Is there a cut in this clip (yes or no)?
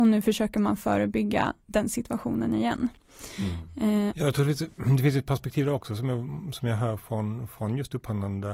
yes